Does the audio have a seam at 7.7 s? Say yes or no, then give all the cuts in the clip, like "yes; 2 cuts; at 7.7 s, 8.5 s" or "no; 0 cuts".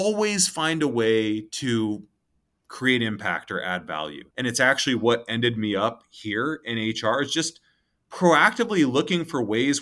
no; 1 cut; at 4.3 s